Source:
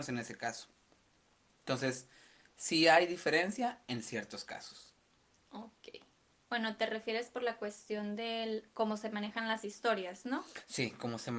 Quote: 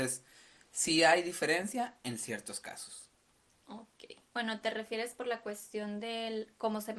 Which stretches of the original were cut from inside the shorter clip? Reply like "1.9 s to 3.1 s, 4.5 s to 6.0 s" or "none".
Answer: 6.1 s to 6.4 s